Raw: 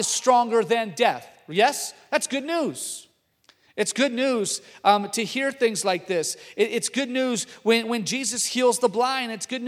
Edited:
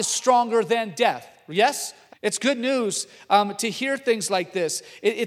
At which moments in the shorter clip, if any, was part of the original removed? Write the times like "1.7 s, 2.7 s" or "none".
2.1 s